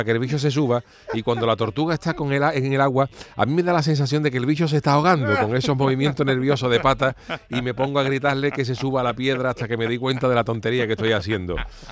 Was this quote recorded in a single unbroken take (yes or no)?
yes